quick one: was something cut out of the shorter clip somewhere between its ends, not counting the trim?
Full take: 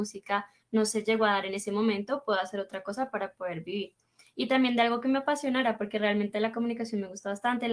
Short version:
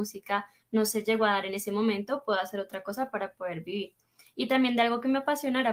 no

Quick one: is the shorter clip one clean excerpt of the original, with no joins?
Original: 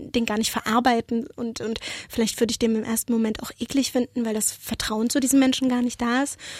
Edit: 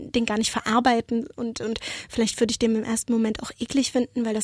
yes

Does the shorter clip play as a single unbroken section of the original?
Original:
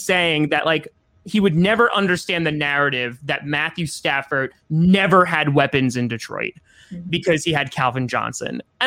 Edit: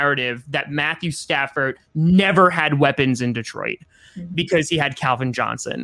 yes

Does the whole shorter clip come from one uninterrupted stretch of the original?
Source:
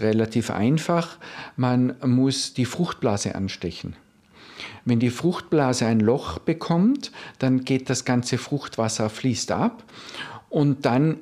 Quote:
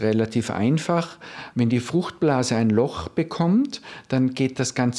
no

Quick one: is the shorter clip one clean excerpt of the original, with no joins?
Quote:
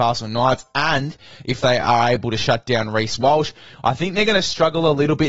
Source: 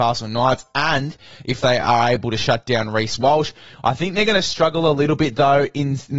yes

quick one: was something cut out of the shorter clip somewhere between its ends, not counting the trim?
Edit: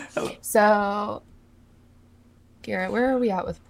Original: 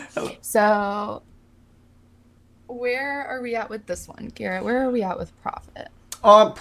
yes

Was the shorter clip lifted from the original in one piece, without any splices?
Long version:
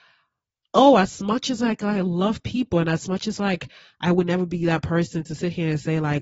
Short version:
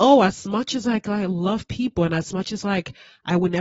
yes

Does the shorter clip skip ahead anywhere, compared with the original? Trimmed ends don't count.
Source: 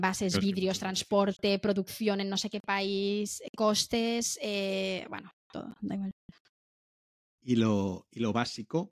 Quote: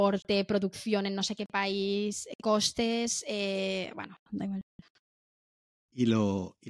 yes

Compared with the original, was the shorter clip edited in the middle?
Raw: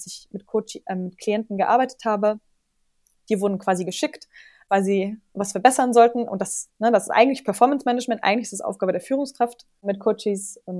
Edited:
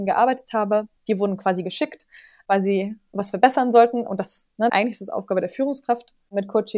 yes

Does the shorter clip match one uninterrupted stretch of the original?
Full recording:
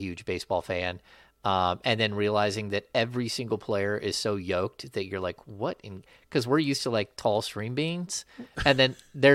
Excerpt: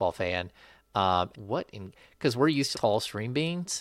no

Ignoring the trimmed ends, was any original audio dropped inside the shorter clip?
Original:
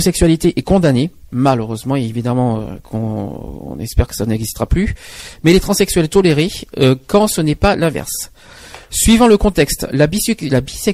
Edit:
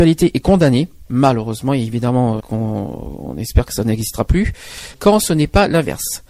yes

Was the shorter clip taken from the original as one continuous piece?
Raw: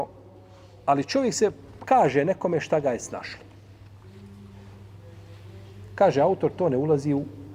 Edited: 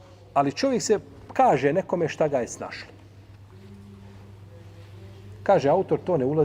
yes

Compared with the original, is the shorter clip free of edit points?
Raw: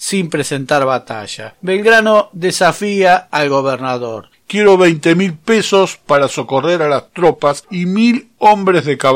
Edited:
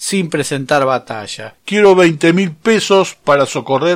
no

